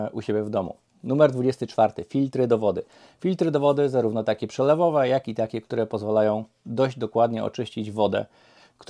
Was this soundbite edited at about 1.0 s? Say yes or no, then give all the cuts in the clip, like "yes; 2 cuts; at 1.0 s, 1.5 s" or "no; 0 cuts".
no; 0 cuts